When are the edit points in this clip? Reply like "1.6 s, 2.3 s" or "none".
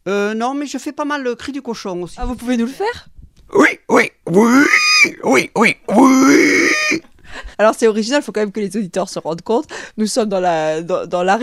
7.5 s